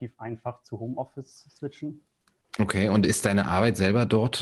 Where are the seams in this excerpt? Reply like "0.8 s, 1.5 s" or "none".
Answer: 2.4 s